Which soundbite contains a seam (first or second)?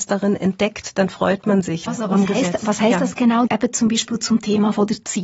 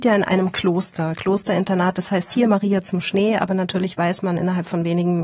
first